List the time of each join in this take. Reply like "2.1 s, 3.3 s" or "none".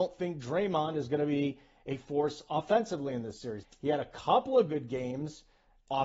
3.6 s